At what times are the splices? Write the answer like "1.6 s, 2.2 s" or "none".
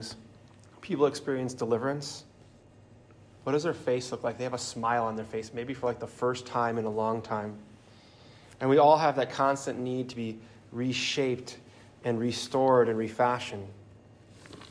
none